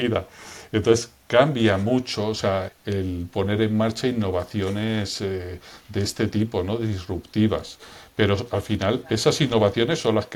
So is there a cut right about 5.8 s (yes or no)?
no